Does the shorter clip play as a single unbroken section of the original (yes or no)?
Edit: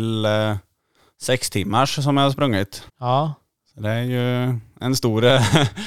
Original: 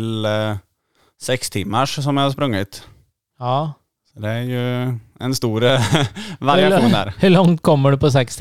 no